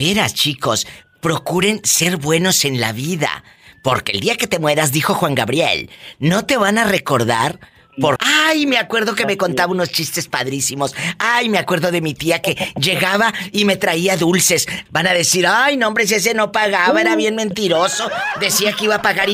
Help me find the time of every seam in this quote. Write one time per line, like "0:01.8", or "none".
0:08.2
0:14.9